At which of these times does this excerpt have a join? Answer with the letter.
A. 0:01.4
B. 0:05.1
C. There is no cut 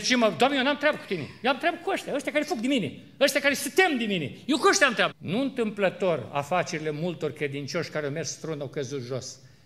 B